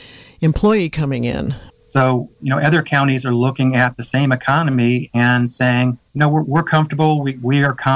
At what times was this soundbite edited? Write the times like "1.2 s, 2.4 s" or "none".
1.7 s, 6.1 s